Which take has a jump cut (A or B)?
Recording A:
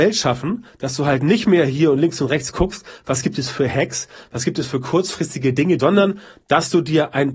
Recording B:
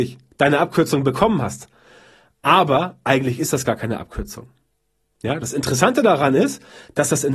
A